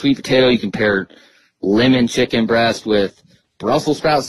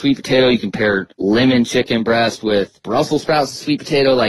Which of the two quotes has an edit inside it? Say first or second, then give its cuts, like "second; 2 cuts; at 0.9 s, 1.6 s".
second; 2 cuts; at 1.1 s, 2.8 s